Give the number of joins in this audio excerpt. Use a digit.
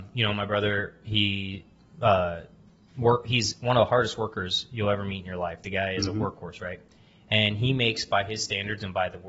0